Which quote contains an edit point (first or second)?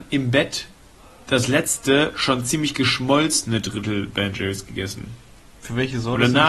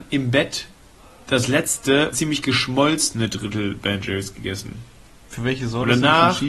second